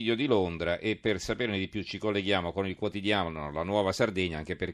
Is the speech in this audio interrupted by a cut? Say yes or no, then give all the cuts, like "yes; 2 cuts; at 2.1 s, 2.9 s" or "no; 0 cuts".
no; 0 cuts